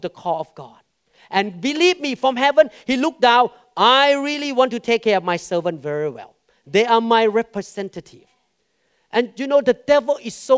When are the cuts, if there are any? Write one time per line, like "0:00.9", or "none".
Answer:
none